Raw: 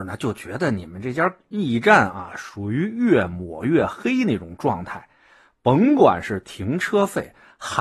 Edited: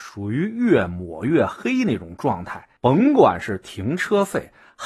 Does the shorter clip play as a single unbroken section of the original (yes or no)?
no